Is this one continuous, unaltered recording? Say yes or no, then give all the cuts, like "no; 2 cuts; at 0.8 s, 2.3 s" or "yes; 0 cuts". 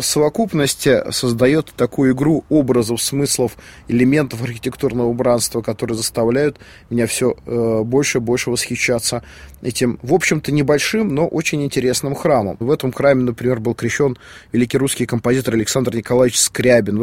yes; 0 cuts